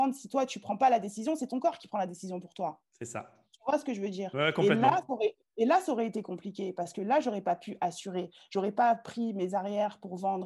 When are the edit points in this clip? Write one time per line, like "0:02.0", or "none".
none